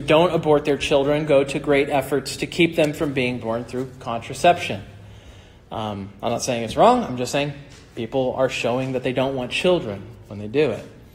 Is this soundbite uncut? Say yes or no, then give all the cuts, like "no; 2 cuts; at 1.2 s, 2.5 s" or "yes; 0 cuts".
yes; 0 cuts